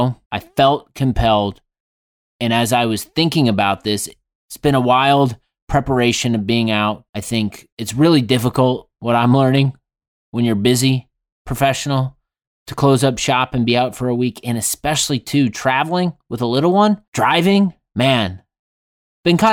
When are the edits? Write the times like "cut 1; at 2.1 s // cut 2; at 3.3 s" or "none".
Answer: none